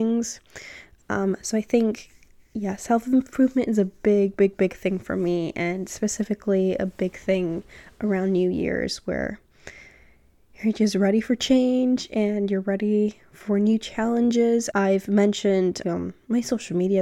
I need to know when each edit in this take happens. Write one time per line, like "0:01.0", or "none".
0:01.0
0:14.7
0:15.8

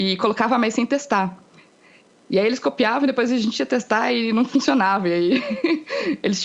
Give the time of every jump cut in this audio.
none

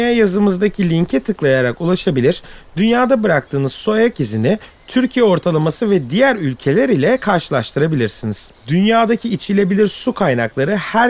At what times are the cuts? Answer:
0:08.5

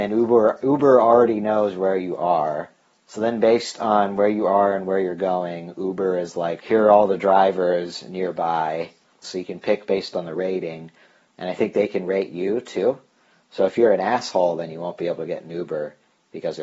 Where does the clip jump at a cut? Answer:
0:06.6
0:09.2

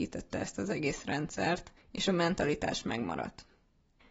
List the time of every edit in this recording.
0:01.8

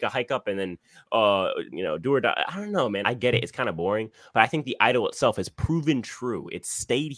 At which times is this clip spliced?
0:01.7
0:03.0

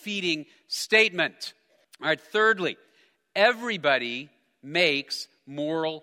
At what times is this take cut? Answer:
0:01.8

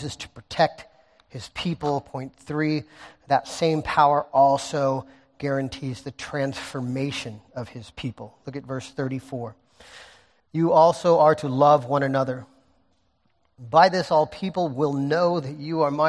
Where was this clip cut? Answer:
0:10.4

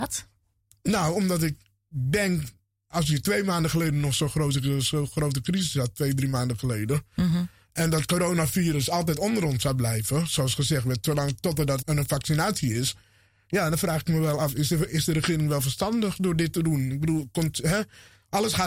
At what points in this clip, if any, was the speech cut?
0:11.8

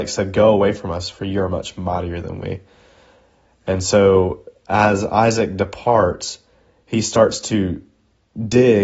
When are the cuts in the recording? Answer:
none

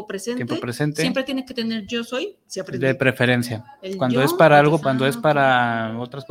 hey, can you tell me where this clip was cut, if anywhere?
0:04.8

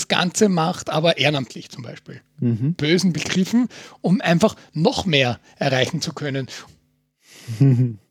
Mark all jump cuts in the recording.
0:02.8
0:06.7

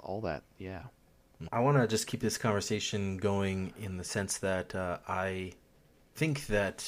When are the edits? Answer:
0:01.5

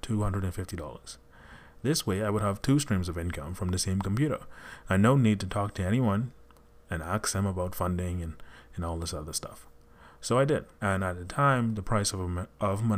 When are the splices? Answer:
0:01.8
0:10.8

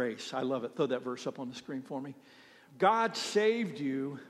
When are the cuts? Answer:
0:02.7

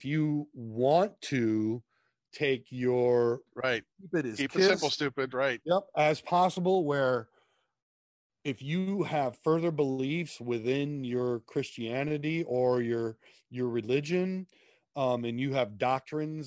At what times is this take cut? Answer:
0:03.5

